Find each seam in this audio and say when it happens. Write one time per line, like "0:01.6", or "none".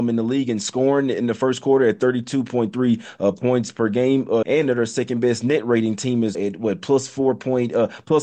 0:04.4
0:06.3

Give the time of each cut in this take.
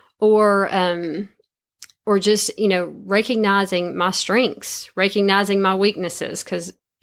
none

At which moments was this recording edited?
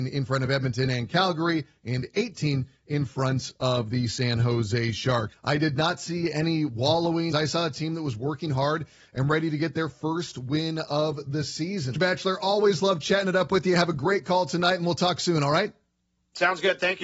0:05.3
0:07.3
0:11.9

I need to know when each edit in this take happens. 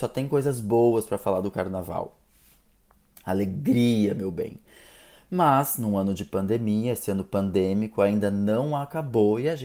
none

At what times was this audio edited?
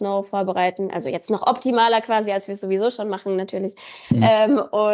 none

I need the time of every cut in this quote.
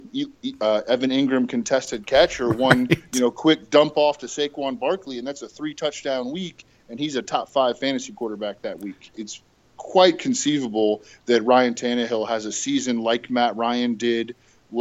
0:09.1

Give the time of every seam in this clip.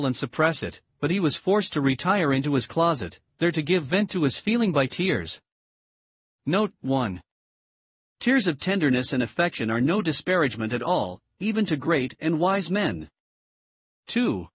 none

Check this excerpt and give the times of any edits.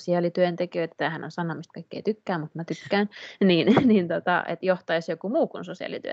none

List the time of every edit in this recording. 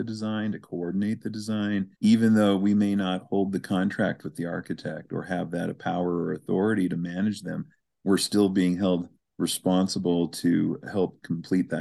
0:01.9

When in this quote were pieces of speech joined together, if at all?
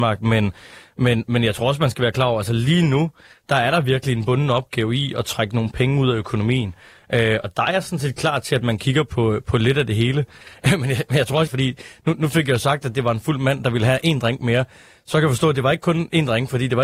0:11.5

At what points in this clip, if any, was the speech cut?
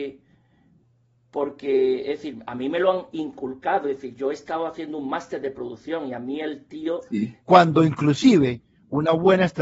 0:07.4

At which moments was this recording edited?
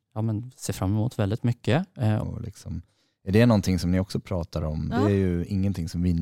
0:02.2
0:04.9

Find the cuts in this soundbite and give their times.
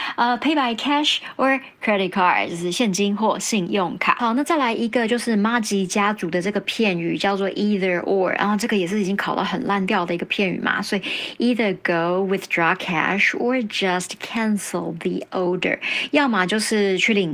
none

